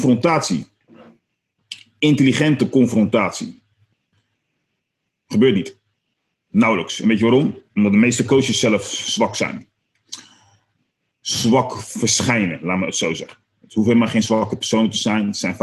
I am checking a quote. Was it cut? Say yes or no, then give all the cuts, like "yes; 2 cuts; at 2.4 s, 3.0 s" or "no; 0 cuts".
no; 0 cuts